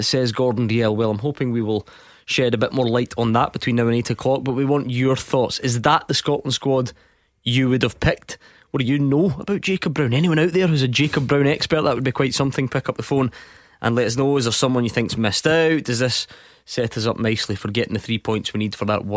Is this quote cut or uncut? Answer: uncut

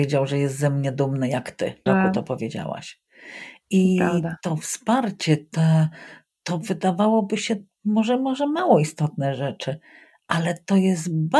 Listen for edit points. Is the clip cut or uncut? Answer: cut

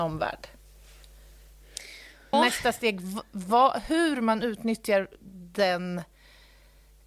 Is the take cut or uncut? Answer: cut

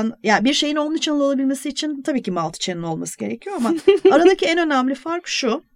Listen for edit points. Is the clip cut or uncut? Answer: uncut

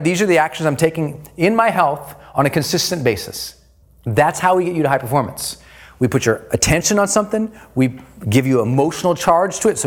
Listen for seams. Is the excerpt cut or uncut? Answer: cut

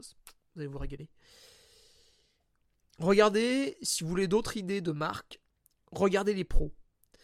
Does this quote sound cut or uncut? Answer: uncut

